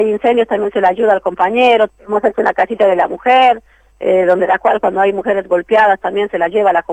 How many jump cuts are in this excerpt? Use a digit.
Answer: 1